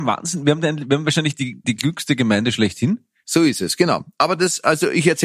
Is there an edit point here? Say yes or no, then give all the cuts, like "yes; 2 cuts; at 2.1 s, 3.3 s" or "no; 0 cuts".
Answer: yes; 2 cuts; at 1.6 s, 3.2 s